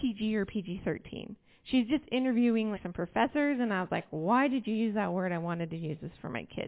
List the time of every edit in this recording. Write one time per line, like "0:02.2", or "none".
0:02.7